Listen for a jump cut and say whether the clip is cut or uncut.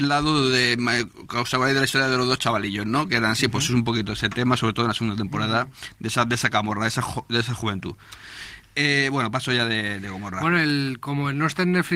uncut